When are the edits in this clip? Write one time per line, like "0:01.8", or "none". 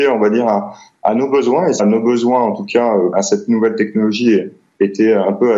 0:01.8
0:03.1

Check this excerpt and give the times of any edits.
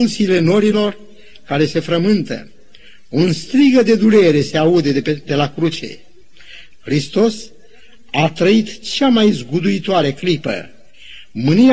0:06.7

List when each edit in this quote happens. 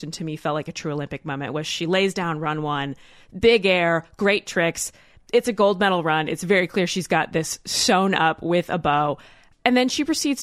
none

